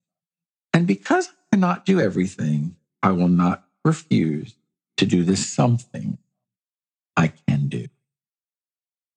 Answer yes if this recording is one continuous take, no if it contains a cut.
yes